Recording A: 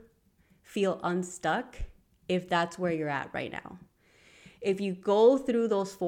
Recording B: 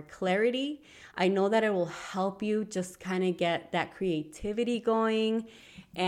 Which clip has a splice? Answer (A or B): B